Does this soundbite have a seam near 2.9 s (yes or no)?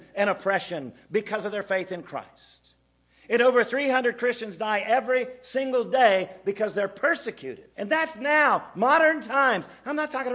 no